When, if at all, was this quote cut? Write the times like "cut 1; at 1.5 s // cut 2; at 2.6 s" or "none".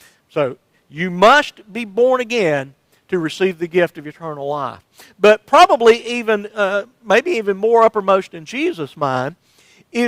none